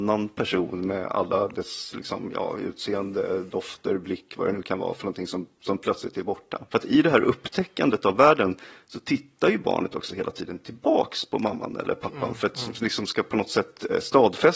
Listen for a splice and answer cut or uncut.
cut